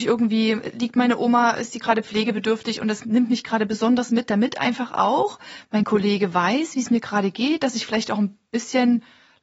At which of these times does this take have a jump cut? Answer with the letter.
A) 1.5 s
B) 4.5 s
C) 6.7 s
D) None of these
D